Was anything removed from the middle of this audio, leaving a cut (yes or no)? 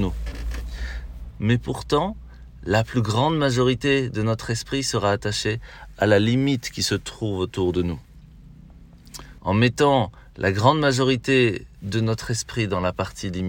yes